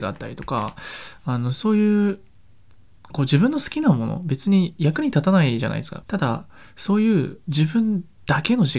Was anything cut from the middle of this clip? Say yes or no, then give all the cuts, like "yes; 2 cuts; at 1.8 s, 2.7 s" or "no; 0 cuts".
yes; 1 cut; at 6.0 s